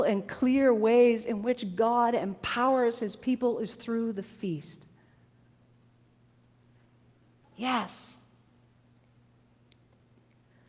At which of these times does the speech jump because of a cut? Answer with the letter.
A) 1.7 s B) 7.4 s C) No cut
B